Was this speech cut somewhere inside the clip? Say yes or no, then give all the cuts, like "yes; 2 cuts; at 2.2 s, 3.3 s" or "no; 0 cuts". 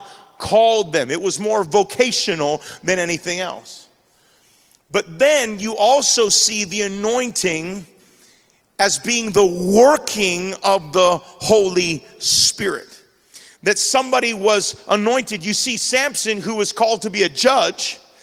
no; 0 cuts